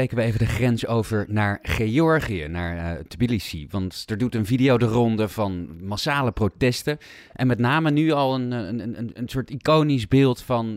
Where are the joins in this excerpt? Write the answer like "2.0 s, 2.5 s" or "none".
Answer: none

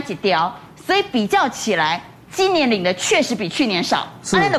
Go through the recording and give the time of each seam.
none

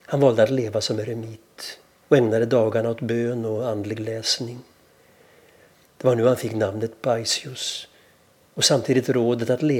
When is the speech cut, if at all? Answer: 5.8 s

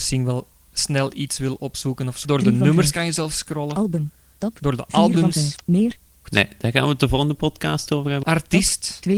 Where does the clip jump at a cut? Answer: 2.2 s, 6.2 s, 8.2 s

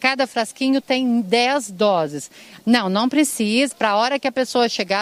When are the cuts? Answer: 2.6 s, 3.7 s

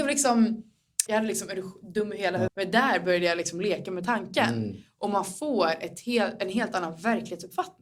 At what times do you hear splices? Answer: 1.1 s, 2.5 s

